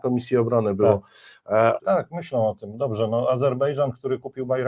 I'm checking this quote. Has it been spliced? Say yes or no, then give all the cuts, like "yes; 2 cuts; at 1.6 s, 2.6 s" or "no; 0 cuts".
yes; 1 cut; at 1.8 s